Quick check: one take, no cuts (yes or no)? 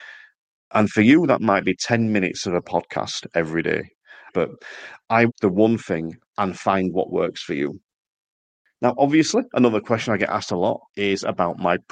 no